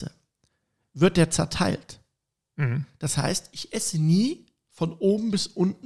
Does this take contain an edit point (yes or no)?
no